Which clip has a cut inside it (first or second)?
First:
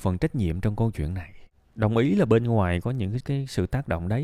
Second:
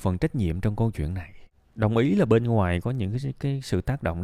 first